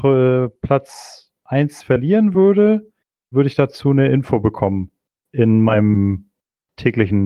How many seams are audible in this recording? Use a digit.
1